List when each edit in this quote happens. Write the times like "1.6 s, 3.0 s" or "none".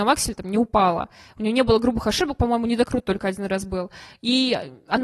none